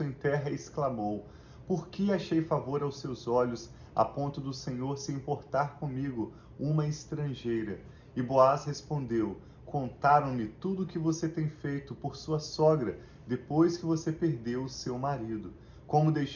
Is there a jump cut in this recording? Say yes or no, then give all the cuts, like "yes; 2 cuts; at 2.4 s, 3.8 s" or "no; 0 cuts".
no; 0 cuts